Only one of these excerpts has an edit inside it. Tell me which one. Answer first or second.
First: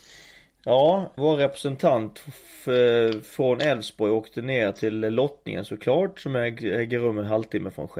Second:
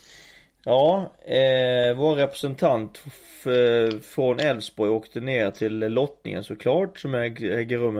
first